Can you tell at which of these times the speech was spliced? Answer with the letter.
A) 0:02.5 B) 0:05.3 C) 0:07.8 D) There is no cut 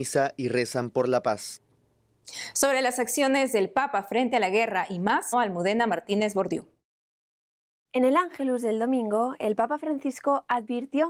B